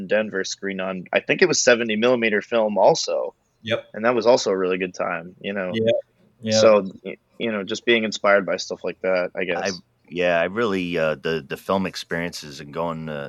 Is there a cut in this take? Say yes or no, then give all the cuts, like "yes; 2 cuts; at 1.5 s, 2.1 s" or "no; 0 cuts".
no; 0 cuts